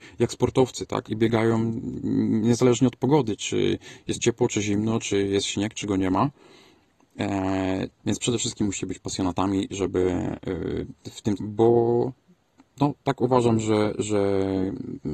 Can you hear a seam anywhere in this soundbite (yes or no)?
yes